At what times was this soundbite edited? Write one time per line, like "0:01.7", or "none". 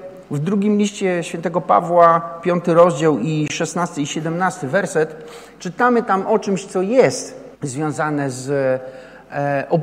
0:07.5